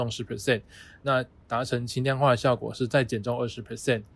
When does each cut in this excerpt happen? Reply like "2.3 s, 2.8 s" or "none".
1.0 s